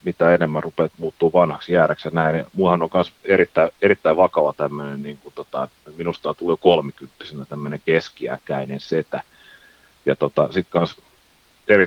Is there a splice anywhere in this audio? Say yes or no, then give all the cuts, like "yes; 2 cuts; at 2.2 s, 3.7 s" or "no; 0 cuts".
no; 0 cuts